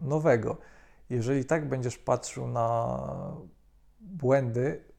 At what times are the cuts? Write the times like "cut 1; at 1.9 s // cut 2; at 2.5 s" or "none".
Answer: none